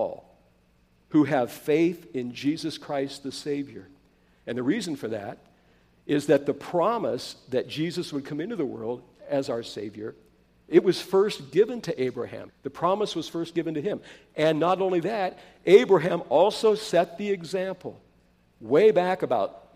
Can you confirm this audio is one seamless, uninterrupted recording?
no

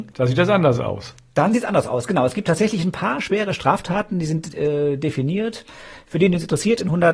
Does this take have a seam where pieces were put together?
no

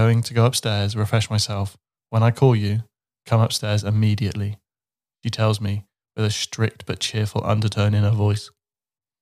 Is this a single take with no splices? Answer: yes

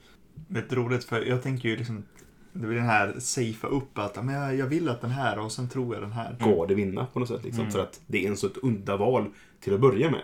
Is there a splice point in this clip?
yes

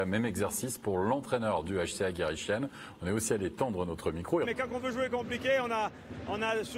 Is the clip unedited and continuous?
no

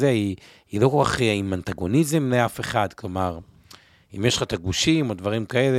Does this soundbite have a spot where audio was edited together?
no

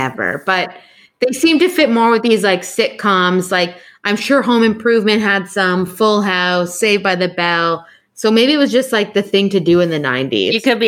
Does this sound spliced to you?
no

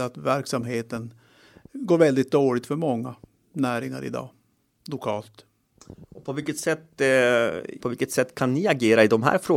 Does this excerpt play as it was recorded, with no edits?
no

